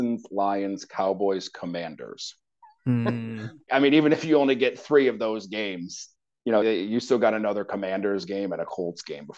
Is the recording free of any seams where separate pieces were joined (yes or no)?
no